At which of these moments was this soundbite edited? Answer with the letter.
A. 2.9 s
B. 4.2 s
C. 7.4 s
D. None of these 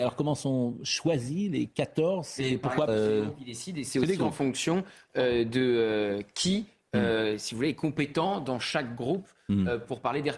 A